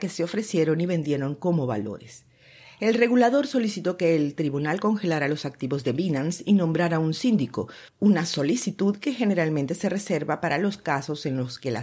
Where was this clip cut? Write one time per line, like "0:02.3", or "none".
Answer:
none